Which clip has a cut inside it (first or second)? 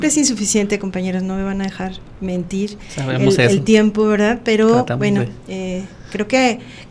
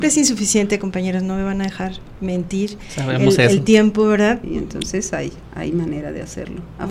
second